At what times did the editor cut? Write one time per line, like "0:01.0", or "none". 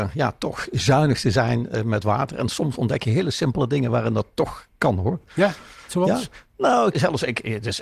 0:06.9